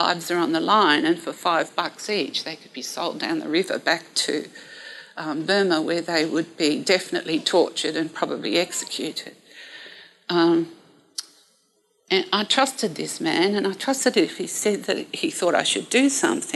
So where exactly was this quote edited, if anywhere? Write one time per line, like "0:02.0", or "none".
none